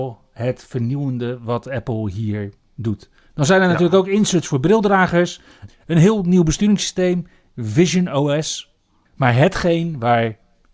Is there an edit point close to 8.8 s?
no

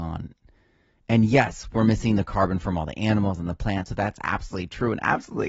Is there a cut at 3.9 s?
no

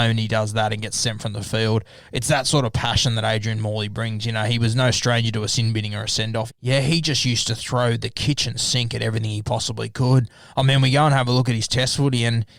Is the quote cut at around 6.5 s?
yes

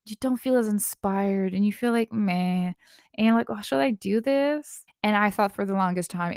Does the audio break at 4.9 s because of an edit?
yes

